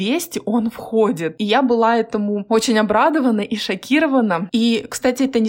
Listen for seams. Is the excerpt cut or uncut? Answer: uncut